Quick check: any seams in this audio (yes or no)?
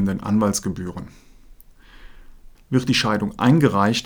yes